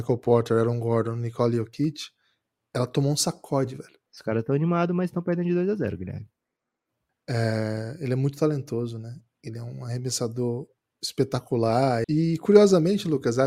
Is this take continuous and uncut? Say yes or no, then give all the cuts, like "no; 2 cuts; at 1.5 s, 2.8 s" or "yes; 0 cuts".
no; 3 cuts; at 4.1 s, 7.1 s, 12.0 s